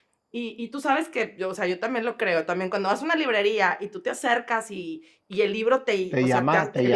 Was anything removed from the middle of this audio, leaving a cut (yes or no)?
no